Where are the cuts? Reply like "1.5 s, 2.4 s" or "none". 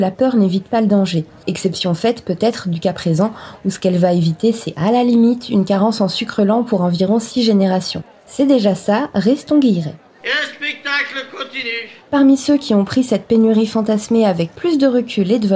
none